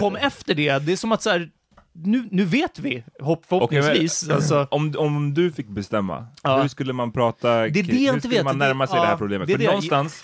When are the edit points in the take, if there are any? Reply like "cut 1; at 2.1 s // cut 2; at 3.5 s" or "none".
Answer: none